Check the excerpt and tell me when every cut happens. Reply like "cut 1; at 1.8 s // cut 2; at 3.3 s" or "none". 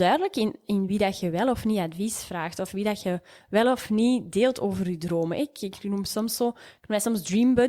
none